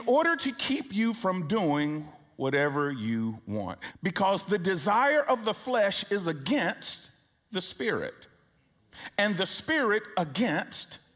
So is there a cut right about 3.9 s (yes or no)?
yes